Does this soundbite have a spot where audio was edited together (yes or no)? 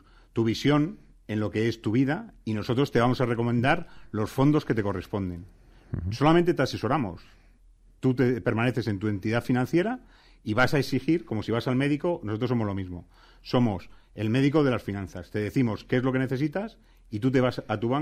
no